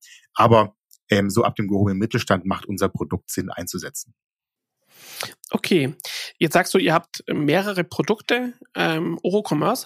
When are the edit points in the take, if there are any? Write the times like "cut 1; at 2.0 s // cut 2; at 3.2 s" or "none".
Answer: none